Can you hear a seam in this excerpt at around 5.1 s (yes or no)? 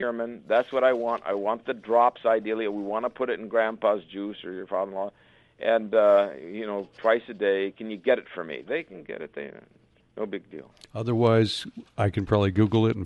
no